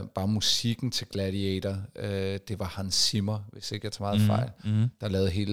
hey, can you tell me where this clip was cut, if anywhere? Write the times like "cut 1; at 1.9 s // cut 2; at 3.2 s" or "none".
none

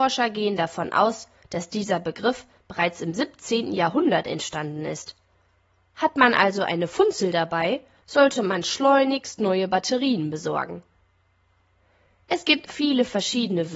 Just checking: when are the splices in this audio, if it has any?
cut 1; at 12.7 s

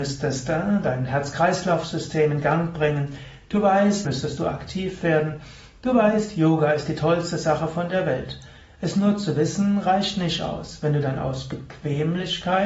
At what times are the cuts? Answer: cut 1; at 4.1 s

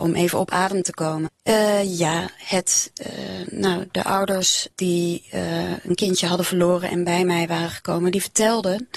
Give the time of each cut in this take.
cut 1; at 1.3 s // cut 2; at 4.7 s

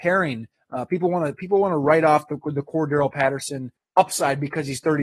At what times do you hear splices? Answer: none

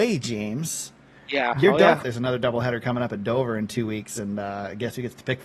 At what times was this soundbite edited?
cut 1; at 2.0 s

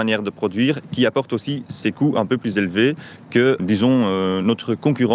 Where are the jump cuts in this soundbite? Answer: cut 1; at 3.6 s

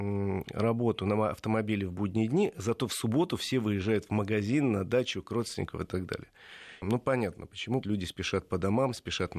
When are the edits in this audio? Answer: cut 1; at 6.8 s // cut 2; at 7.8 s

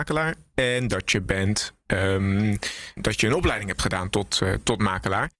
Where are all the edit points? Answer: cut 1; at 3.0 s

